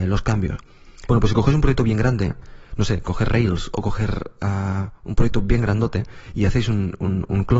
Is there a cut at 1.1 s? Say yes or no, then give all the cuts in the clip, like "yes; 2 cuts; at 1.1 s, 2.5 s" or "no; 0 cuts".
yes; 1 cut; at 1.1 s